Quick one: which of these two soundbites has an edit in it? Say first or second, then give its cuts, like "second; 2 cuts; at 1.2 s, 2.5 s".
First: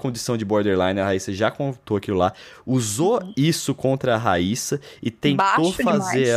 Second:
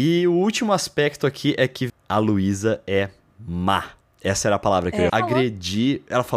second; 2 cuts; at 1.9 s, 5.1 s